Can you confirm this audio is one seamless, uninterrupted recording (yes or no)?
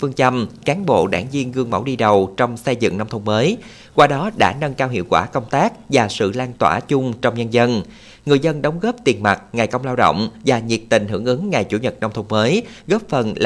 yes